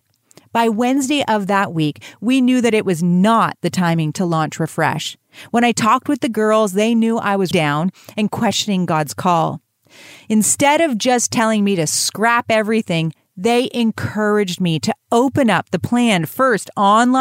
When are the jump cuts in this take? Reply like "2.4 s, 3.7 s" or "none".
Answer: 7.5 s